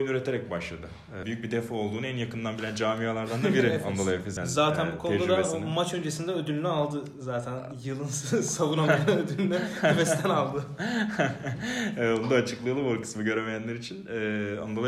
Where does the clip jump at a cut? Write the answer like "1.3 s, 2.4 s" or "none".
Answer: 1.2 s, 4.4 s